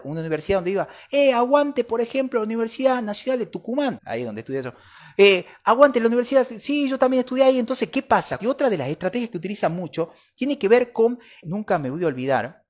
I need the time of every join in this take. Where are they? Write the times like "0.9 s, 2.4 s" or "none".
4.0 s, 8.4 s, 11.4 s